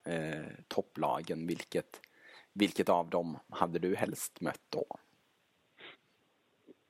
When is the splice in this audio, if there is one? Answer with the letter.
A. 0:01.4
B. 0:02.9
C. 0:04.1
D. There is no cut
D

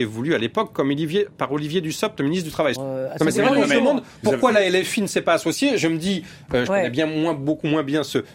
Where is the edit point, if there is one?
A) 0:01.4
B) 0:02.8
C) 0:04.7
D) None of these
B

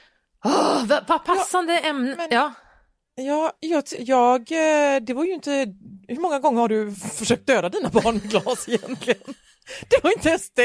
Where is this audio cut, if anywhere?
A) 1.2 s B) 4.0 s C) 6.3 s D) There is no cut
B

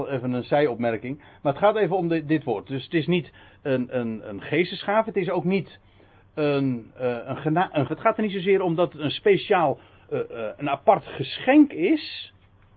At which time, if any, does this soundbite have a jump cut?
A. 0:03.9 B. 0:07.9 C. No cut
B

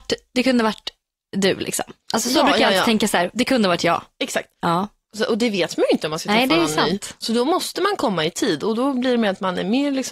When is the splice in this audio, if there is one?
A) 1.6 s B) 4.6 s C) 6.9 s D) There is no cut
B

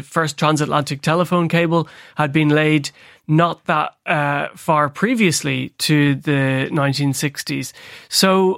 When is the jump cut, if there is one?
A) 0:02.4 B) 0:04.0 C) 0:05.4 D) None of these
D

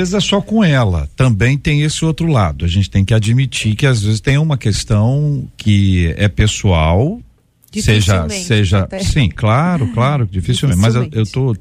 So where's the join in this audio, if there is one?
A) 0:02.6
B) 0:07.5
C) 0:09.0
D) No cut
D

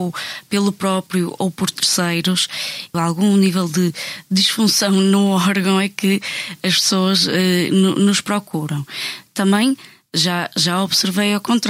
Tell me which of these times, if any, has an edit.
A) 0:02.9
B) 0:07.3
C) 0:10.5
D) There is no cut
A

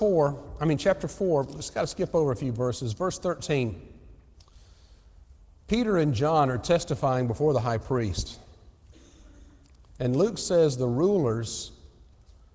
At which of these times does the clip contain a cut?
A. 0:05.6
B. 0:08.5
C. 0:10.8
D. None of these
D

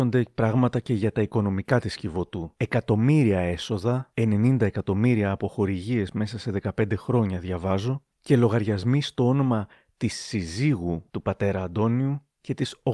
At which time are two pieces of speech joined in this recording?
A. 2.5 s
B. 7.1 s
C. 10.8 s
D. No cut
D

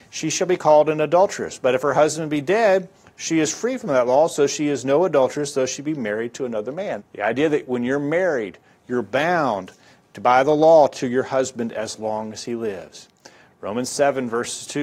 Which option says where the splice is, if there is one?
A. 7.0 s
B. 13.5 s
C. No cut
A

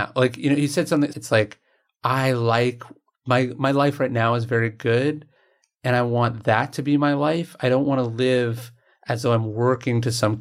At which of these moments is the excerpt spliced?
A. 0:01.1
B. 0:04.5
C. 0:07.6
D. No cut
A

